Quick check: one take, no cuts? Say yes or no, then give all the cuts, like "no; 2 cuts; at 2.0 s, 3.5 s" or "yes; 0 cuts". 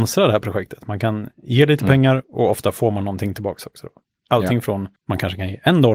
no; 1 cut; at 5.0 s